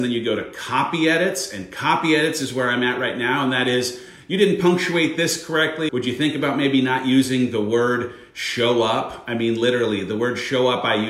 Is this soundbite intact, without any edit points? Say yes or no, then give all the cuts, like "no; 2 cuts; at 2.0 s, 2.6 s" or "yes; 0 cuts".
no; 1 cut; at 5.9 s